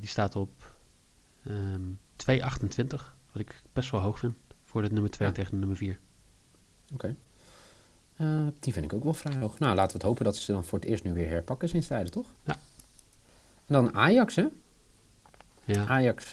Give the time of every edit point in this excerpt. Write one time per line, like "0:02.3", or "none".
0:12.4

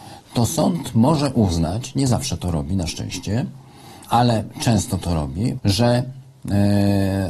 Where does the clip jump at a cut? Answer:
0:04.0
0:05.6

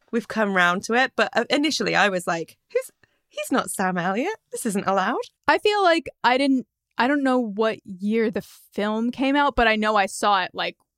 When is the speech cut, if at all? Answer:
none

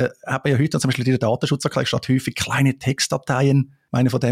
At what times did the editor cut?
none

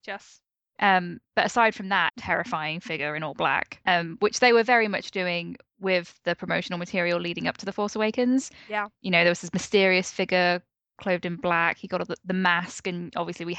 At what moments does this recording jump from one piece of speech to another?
0:02.1
0:03.9

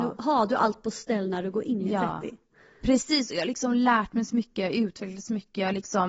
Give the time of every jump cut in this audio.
none

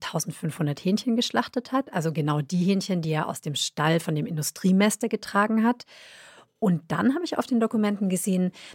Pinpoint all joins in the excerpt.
none

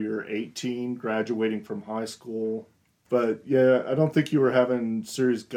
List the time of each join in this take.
0:03.0

